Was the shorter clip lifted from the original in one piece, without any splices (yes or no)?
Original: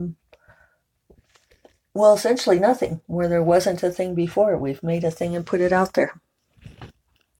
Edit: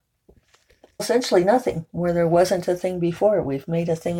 no